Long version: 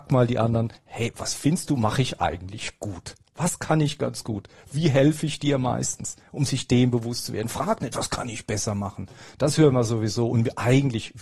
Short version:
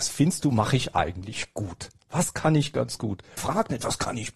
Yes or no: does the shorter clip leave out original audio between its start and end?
yes